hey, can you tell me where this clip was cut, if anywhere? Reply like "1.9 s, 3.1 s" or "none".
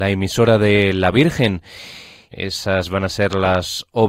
2.3 s